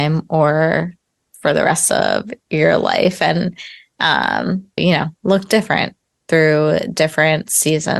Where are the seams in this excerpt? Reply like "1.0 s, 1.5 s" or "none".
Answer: 4.8 s